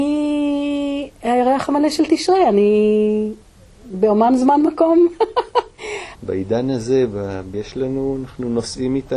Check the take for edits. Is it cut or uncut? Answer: cut